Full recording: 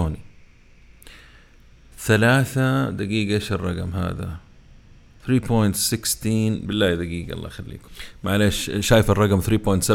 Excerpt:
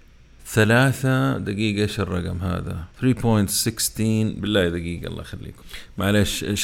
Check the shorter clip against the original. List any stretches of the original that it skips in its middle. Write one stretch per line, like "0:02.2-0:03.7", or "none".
0:04.4-0:05.2